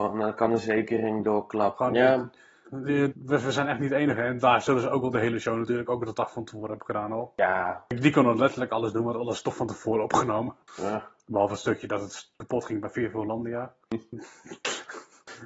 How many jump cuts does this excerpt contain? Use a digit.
2